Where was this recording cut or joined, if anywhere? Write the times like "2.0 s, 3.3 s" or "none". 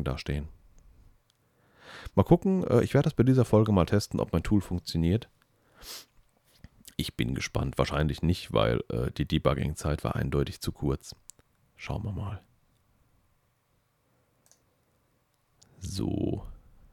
none